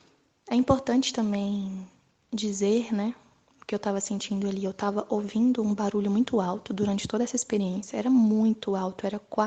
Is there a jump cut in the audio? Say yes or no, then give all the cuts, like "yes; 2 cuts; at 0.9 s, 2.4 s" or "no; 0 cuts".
no; 0 cuts